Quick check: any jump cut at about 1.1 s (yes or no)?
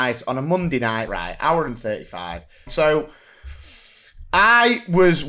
yes